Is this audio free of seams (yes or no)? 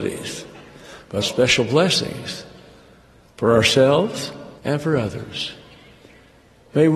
no